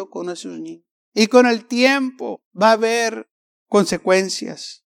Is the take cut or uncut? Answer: cut